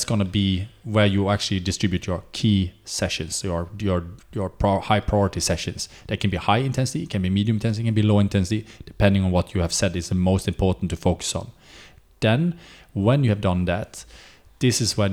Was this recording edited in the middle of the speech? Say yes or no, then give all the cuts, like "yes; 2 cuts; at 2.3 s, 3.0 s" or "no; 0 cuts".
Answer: yes; 1 cut; at 4.2 s